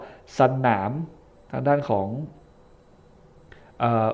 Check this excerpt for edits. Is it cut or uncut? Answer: uncut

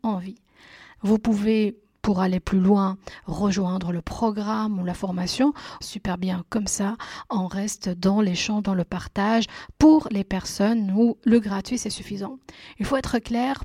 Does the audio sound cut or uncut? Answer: cut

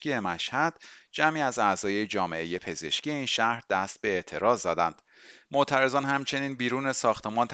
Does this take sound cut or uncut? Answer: cut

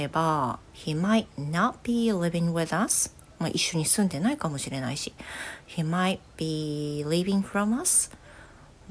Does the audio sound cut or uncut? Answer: uncut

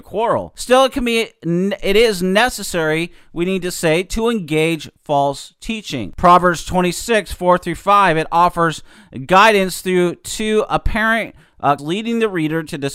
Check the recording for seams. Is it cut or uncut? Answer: cut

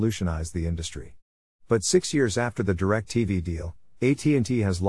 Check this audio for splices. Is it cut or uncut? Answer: uncut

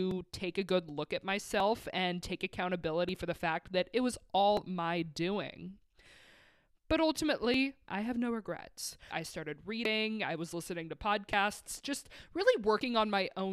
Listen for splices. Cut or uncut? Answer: cut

